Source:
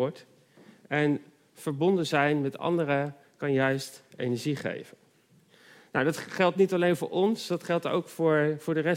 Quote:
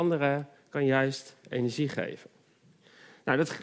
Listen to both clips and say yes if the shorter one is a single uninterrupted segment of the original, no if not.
yes